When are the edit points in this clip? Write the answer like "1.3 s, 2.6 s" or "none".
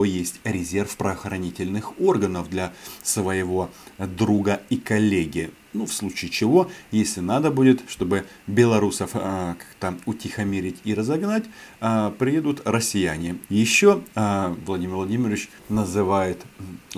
13.5 s, 15.6 s